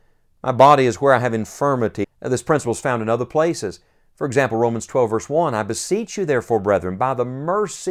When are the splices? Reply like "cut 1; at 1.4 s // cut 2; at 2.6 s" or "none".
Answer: cut 1; at 2.0 s